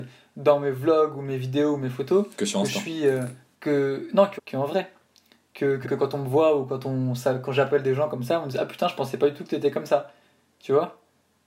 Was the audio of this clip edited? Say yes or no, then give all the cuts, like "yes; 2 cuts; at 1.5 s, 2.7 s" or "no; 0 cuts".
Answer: yes; 2 cuts; at 4.4 s, 5.8 s